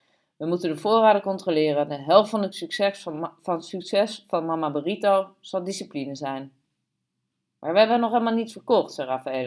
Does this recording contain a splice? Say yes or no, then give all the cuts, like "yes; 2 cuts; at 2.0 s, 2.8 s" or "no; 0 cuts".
no; 0 cuts